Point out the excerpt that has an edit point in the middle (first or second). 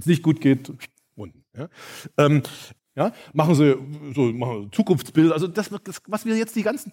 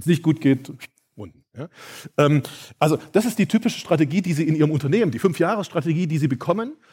first